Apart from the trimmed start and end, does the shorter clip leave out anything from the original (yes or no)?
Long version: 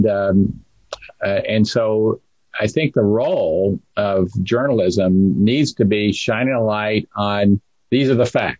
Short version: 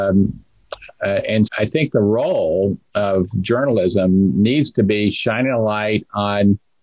yes